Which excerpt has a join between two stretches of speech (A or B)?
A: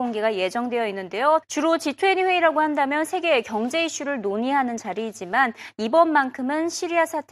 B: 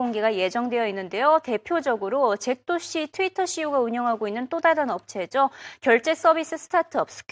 A